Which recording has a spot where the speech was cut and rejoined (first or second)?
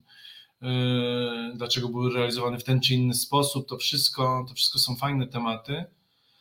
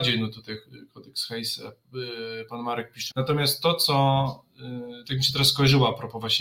second